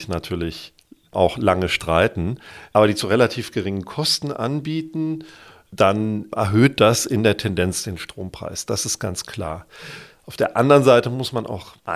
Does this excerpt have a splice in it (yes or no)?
no